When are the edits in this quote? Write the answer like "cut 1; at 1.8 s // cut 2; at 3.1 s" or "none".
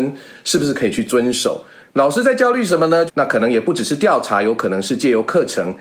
cut 1; at 1.8 s // cut 2; at 3.1 s